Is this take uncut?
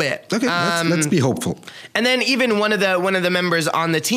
yes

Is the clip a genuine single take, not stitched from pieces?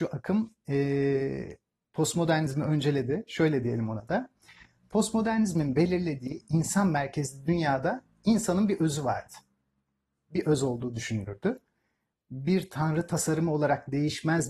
no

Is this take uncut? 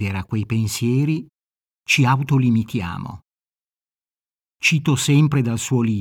yes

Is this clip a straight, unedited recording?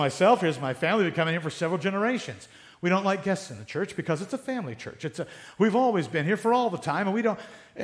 yes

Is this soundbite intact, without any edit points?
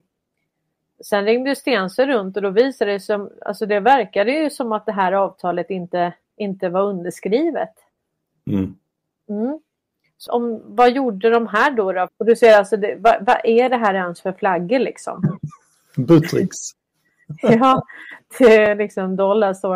no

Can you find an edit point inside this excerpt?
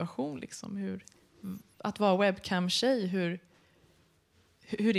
no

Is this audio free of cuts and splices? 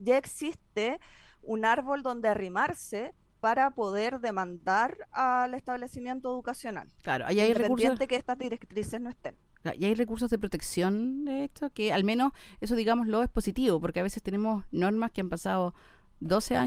yes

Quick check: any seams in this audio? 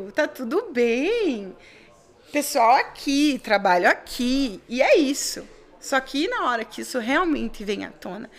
no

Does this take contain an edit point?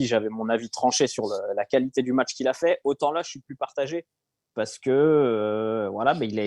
no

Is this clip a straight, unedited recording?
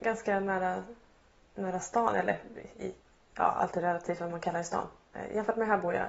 yes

